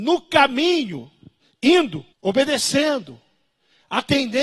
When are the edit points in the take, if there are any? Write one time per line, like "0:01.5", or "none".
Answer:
0:02.1

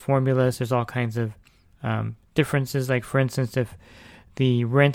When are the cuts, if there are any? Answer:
none

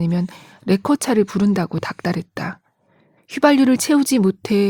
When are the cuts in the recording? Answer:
0:03.2

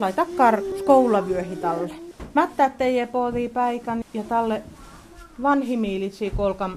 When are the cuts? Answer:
0:04.0

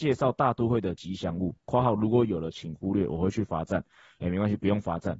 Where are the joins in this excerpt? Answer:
none

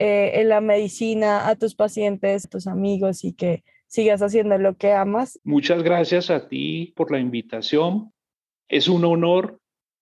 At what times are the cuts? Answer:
0:02.4
0:05.4
0:07.0

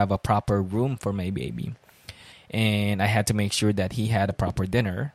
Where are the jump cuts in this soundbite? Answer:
0:02.3

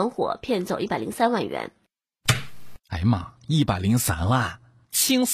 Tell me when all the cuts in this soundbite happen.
0:02.8

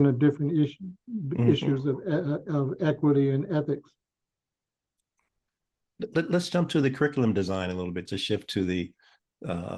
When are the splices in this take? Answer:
0:08.1

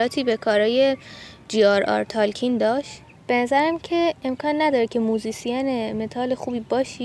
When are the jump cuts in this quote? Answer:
none

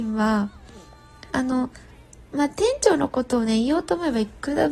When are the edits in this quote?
0:01.3

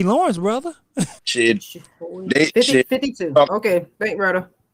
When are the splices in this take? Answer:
0:01.2

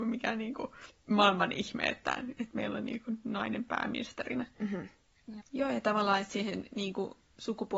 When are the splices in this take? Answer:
0:05.4

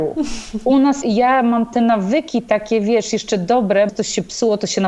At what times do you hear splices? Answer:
0:01.0
0:03.9

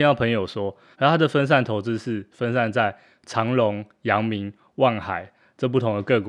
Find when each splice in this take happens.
0:00.9

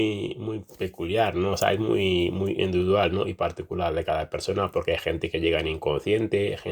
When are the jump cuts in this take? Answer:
none

